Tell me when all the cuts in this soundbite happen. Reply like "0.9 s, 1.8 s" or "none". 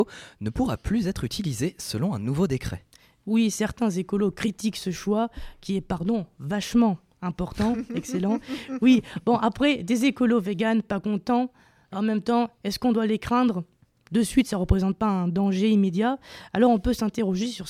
none